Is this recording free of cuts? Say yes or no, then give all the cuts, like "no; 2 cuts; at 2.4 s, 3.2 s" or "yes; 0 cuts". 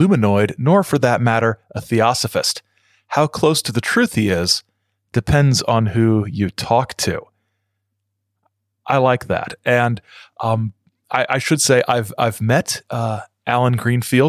yes; 0 cuts